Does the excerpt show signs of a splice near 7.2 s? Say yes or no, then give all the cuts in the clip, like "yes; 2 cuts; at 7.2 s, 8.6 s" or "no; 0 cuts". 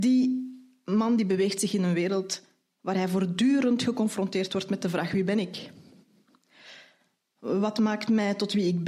no; 0 cuts